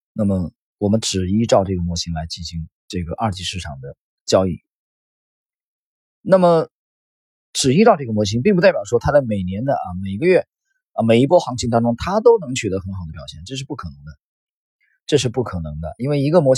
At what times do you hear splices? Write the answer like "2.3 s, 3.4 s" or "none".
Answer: none